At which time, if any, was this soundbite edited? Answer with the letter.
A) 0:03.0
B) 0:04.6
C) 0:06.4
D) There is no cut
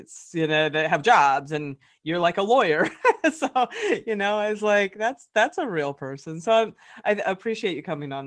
D